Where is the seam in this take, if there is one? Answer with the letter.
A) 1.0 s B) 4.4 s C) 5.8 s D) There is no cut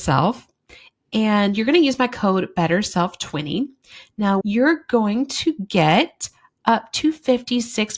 B